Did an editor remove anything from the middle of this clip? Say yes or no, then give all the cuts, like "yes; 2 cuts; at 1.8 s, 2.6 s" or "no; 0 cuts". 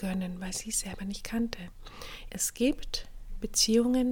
yes; 1 cut; at 2.3 s